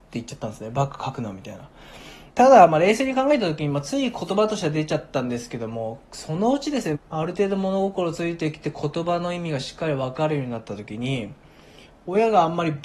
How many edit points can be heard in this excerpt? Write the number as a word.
two